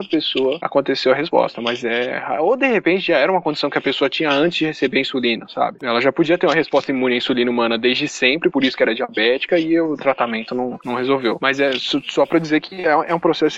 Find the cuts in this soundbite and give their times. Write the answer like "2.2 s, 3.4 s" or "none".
5.8 s

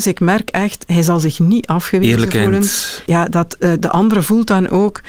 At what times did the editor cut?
3.1 s

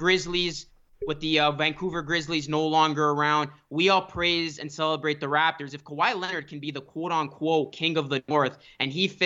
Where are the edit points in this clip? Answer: 3.7 s

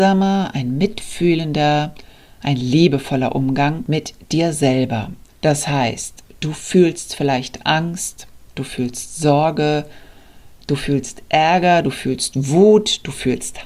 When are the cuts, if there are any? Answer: 5.3 s

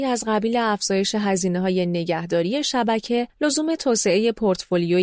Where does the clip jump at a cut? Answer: 3.3 s

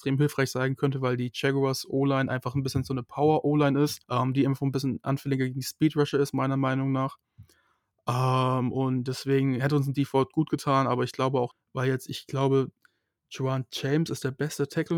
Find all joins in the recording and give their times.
4.0 s, 11.5 s

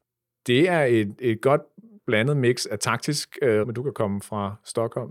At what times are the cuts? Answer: 3.6 s

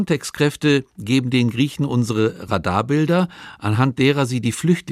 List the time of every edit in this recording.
none

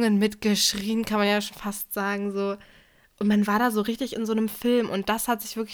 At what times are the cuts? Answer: none

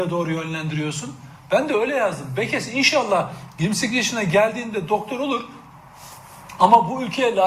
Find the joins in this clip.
none

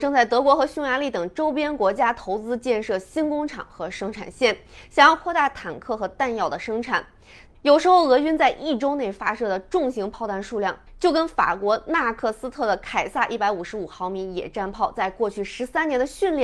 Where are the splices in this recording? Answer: 7.5 s

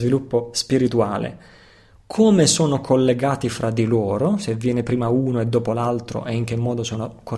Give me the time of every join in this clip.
none

